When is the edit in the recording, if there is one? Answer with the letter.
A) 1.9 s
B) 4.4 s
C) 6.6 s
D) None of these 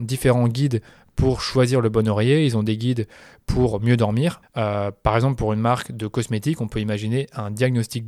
B